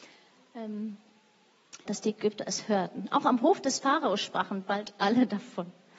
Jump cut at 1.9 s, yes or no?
yes